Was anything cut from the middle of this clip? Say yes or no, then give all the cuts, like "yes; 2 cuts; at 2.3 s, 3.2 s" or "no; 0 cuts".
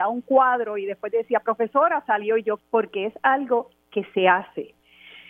yes; 1 cut; at 2.6 s